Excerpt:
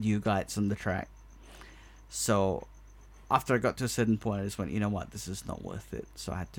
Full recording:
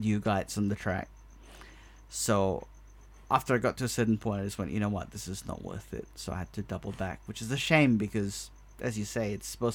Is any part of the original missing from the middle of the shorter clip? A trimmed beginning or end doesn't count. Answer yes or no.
no